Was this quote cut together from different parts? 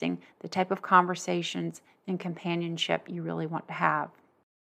no; 0 cuts

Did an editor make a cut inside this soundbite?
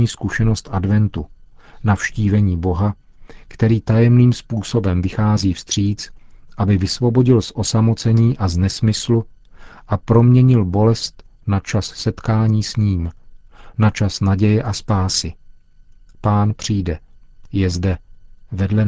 no; 0 cuts

